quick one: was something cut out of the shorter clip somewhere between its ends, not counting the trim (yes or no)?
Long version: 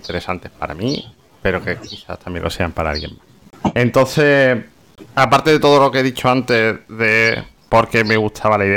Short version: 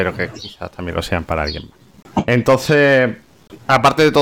no